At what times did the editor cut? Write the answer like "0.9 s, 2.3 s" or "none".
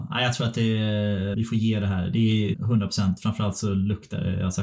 1.3 s, 2.5 s

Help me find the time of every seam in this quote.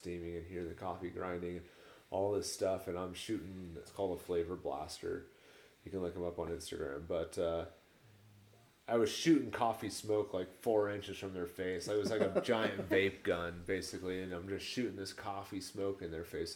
3.8 s

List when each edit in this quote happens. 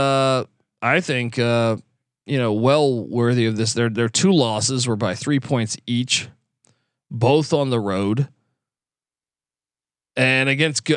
none

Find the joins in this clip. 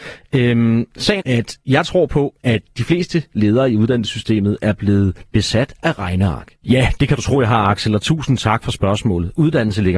1.2 s, 6.6 s

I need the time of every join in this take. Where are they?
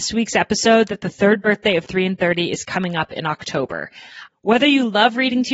4.3 s

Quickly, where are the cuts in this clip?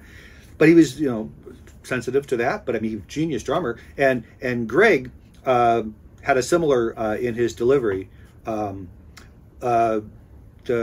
6.9 s, 8.4 s

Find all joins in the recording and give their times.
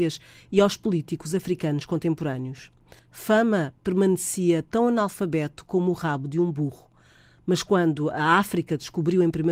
3.0 s

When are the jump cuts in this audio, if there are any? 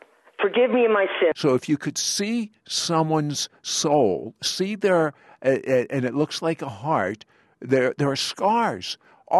1.3 s

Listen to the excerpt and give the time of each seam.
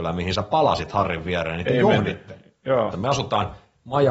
2.9 s

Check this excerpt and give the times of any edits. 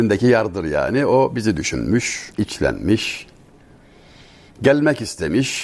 2.3 s

